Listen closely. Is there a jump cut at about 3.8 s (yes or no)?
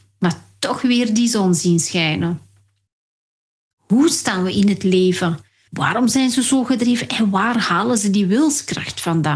no